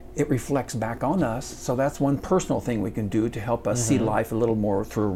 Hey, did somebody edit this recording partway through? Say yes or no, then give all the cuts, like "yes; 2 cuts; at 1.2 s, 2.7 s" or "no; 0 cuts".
no; 0 cuts